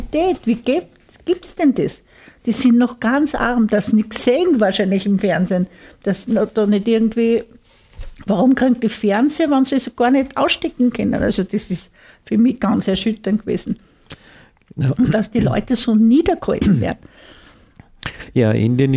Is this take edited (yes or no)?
no